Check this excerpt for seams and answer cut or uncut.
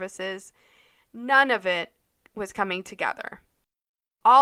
uncut